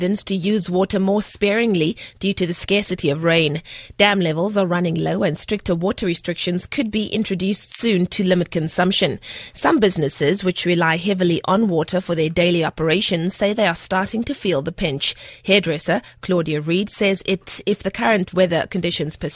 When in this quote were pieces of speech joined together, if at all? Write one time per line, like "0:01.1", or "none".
none